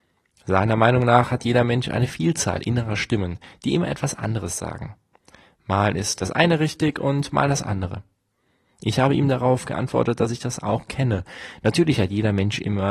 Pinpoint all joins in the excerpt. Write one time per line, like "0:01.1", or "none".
none